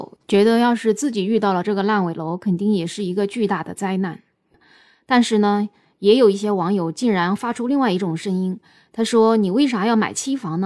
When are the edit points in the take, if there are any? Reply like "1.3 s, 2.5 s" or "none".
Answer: none